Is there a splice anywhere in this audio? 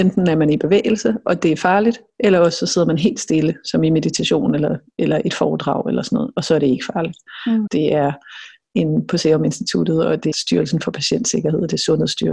yes; 2 cuts; at 7.7 s, 10.3 s

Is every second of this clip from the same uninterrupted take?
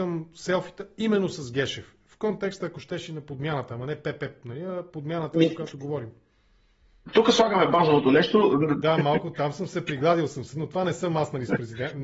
no; 1 cut; at 8.8 s

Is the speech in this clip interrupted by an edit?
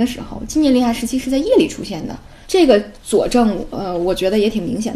yes; 1 cut; at 2.4 s

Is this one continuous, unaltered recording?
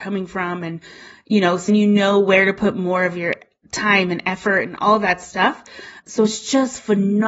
no; 2 cuts; at 1.7 s, 6.0 s

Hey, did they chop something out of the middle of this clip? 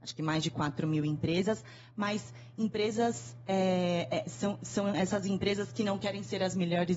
no; 0 cuts

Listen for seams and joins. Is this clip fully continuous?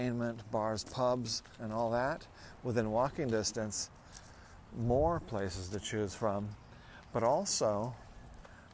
no; 1 cut; at 1.6 s

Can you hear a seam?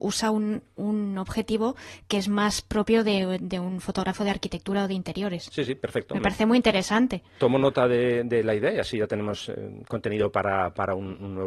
no; 0 cuts

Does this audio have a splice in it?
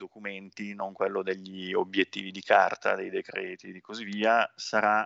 no; 0 cuts

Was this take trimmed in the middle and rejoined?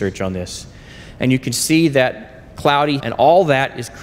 yes; 1 cut; at 3.0 s

